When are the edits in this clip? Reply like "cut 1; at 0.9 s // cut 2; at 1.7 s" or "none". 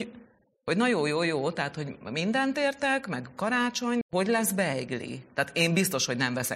cut 1; at 4.0 s